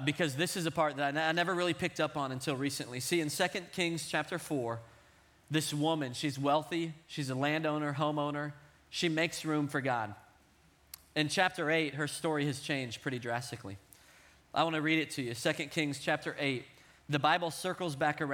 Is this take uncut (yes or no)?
yes